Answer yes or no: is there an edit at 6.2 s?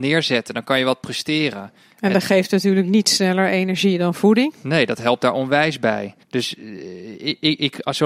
yes